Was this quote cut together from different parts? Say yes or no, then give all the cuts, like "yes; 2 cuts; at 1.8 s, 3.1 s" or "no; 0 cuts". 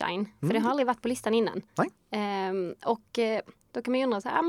no; 0 cuts